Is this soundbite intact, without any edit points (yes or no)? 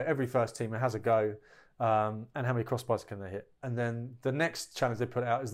no